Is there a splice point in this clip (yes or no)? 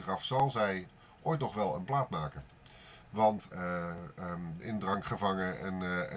yes